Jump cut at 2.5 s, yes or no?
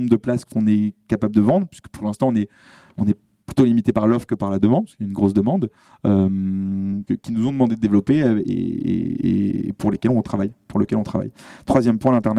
no